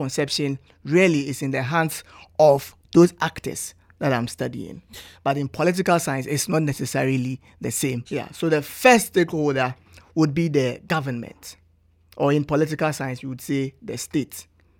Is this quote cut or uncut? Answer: cut